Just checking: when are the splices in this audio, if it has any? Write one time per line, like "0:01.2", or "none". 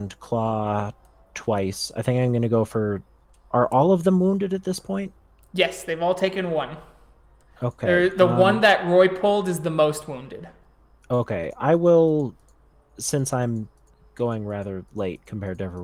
none